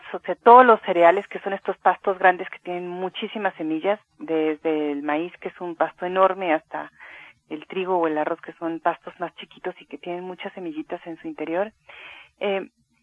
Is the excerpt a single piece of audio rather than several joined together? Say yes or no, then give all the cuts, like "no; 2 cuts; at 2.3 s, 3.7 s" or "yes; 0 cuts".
yes; 0 cuts